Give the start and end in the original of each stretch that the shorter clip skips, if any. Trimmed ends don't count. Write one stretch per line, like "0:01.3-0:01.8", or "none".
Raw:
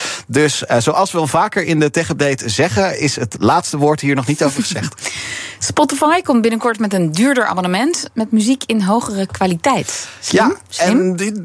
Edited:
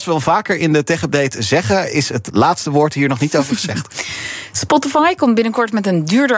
none